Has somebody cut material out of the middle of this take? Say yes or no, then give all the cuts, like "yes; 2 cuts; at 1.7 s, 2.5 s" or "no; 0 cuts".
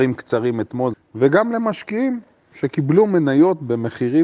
yes; 1 cut; at 0.9 s